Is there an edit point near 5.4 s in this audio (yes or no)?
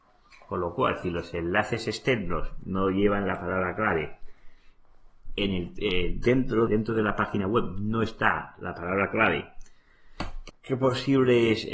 no